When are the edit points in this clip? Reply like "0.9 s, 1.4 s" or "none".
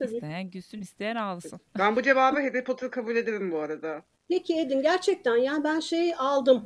none